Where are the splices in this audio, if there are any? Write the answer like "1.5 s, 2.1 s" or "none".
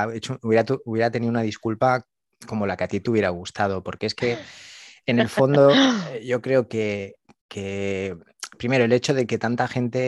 none